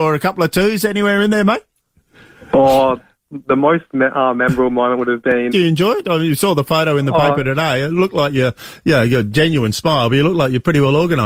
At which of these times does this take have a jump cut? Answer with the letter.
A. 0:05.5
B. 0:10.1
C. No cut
A